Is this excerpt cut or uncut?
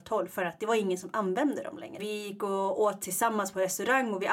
cut